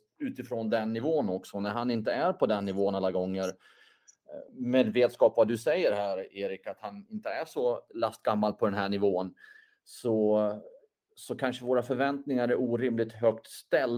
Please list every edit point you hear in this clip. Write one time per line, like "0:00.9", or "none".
0:04.5